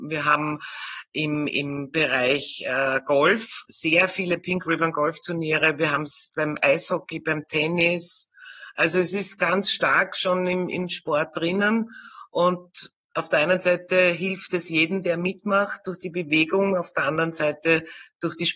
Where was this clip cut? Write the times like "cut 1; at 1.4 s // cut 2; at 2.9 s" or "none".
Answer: none